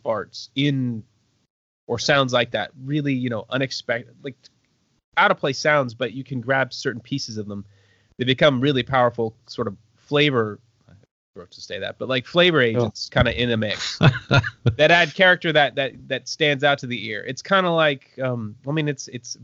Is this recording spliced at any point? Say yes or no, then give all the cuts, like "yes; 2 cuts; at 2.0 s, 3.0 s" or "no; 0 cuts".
no; 0 cuts